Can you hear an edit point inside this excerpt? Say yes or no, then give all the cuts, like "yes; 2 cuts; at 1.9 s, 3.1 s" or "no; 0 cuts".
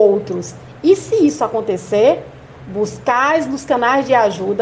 no; 0 cuts